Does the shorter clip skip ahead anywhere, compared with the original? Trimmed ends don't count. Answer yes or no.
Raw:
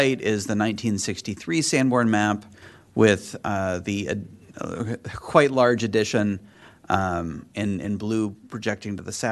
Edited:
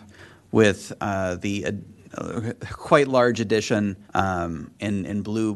yes